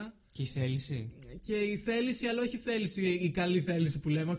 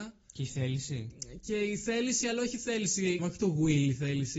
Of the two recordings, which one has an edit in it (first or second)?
second